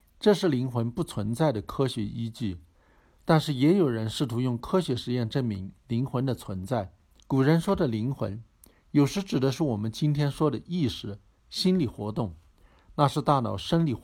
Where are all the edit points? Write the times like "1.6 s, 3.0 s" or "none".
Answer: 7.2 s, 11.4 s